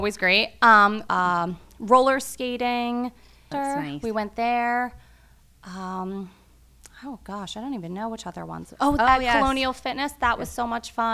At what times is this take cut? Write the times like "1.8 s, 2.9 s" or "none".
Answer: 1.1 s, 3.5 s, 9.0 s